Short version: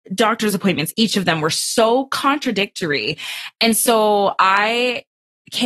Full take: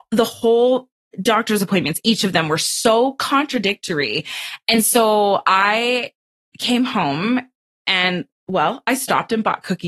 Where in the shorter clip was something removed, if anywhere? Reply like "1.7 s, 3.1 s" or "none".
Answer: none

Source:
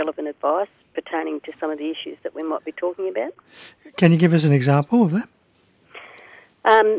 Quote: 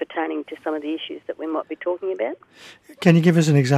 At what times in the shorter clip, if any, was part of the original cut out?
none

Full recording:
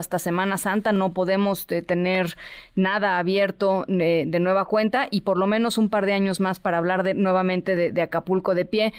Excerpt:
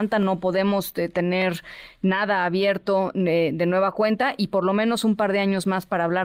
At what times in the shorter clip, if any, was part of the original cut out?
none

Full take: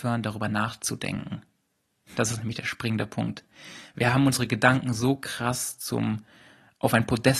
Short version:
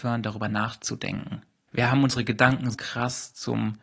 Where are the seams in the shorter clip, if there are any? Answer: 1.7 s, 2.7 s

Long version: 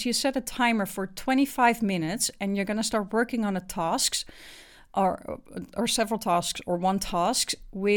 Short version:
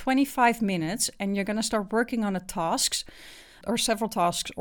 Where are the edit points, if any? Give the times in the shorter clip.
3.6 s

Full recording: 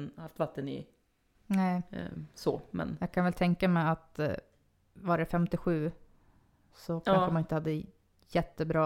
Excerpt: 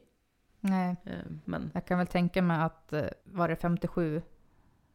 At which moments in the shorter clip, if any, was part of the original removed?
1.4 s, 3.2 s

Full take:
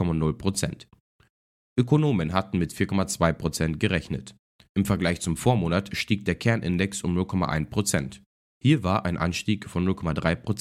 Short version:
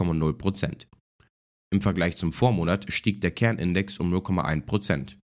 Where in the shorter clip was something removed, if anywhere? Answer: 1.7 s

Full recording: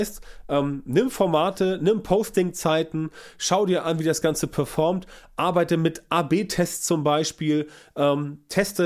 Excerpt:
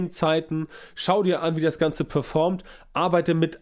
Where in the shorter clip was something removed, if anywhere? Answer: none

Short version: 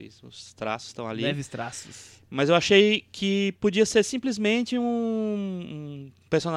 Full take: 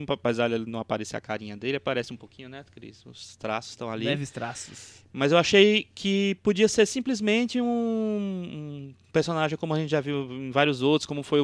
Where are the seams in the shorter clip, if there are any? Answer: none

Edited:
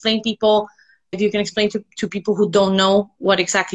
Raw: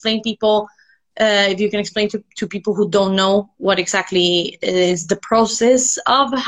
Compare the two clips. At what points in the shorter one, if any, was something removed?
1.1 s

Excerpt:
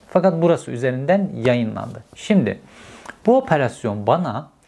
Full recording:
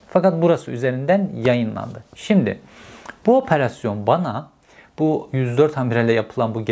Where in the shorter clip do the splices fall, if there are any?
none

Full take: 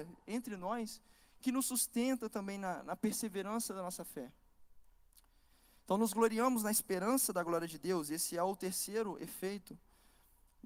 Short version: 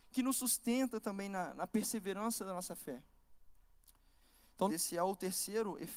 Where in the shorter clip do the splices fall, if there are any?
4.7 s

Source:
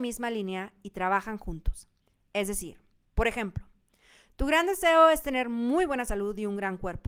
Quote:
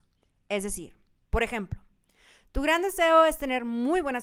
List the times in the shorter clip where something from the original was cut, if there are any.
none

